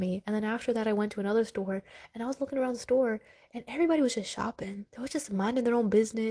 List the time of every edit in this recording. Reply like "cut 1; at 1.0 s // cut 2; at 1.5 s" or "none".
none